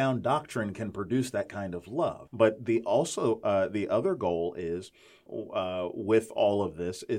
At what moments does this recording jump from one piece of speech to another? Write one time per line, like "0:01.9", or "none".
0:02.3
0:05.3